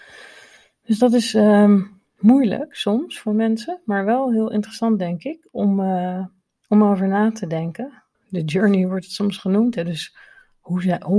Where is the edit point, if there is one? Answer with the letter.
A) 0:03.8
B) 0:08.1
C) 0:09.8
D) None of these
B